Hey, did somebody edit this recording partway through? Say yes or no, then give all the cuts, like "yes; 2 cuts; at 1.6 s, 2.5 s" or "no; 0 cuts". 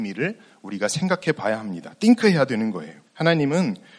yes; 1 cut; at 3.0 s